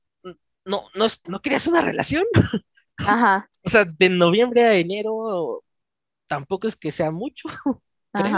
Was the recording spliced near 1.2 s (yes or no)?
yes